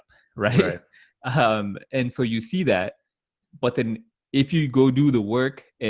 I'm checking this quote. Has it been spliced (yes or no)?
no